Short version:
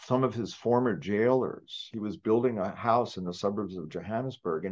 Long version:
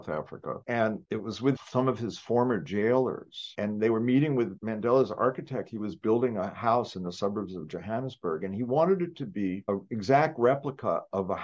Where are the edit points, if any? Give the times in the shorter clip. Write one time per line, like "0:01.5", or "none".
0:01.9